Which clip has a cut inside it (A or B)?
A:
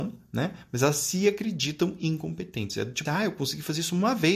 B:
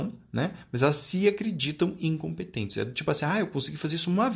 A